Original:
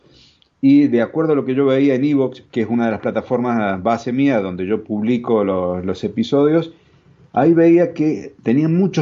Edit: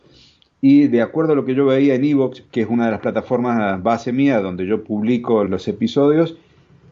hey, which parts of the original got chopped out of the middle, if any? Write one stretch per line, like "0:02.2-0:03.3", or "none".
0:05.5-0:05.8